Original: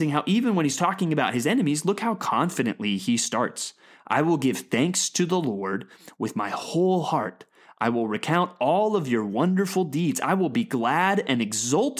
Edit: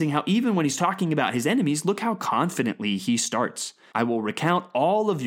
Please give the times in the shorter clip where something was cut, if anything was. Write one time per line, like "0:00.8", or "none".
0:03.9